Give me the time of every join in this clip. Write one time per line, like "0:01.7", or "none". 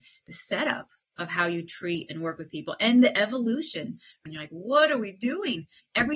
0:04.3